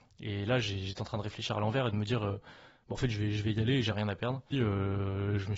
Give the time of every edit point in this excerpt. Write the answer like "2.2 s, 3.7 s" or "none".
4.5 s